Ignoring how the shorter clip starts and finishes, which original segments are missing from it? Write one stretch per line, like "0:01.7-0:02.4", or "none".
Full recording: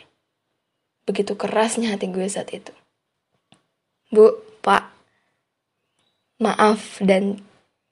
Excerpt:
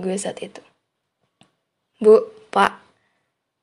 none